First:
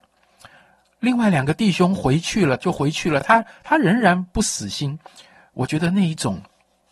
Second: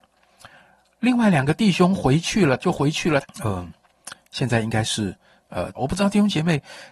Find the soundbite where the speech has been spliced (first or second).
second